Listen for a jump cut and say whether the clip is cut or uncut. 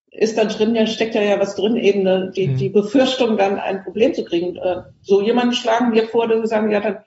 uncut